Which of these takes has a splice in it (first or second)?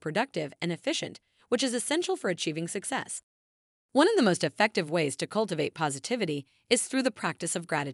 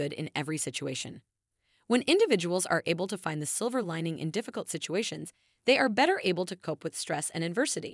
first